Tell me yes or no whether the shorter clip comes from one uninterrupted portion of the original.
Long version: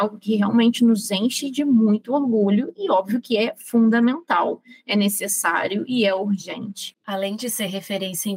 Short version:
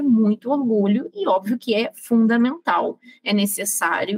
yes